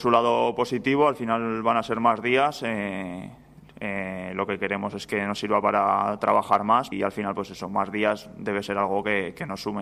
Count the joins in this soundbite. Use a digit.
1